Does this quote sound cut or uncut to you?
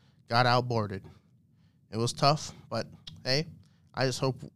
uncut